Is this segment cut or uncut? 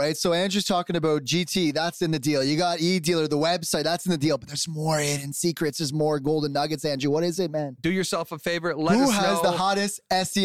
cut